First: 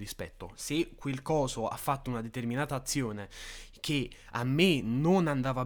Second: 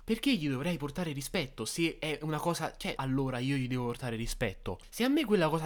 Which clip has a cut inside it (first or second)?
second